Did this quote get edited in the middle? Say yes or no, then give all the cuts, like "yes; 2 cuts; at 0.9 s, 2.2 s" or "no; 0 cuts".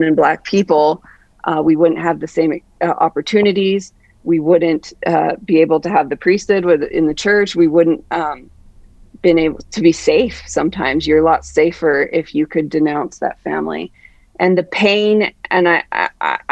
no; 0 cuts